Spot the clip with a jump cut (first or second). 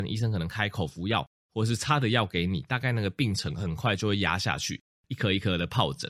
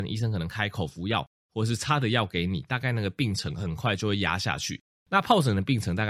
first